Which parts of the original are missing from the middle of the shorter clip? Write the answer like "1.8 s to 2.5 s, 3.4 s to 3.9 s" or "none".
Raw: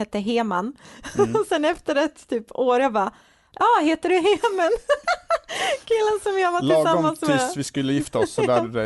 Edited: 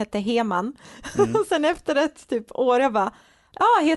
none

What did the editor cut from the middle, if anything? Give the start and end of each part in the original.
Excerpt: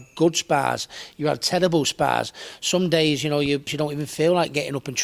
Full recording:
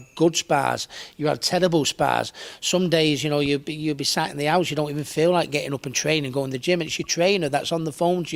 3.7 s to 4.6 s

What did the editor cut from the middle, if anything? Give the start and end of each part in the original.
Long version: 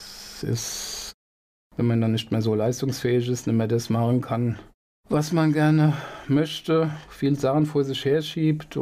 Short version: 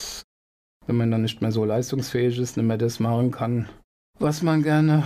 none

